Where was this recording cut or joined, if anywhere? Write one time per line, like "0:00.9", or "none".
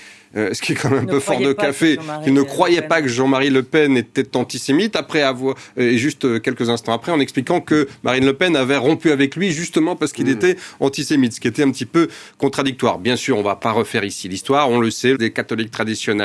0:15.1

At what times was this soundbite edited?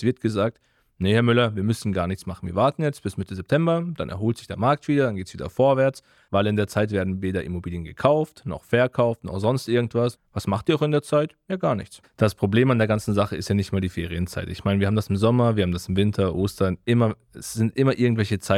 0:10.1
0:12.0

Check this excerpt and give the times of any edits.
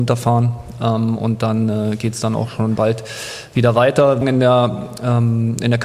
0:04.2

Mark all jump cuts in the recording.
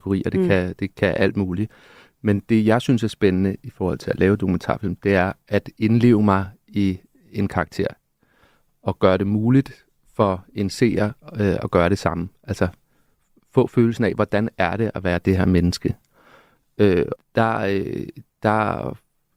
0:17.2

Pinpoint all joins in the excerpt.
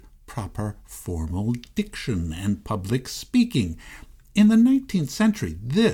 none

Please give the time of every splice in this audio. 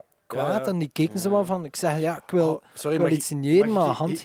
none

